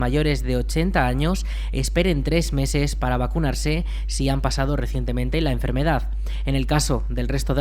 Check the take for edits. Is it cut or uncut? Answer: uncut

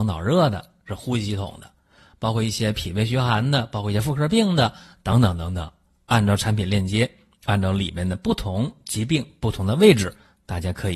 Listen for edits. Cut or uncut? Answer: uncut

